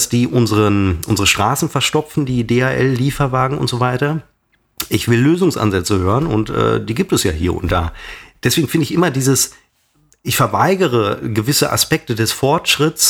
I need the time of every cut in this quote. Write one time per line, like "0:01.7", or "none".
none